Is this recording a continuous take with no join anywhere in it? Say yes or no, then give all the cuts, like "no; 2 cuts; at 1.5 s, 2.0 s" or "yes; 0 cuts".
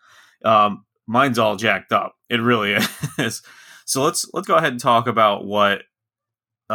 no; 1 cut; at 4.4 s